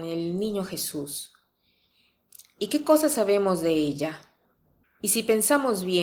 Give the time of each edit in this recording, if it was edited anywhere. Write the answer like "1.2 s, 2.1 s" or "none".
4.8 s